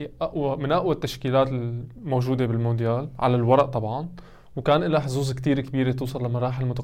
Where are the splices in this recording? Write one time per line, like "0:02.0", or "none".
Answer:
none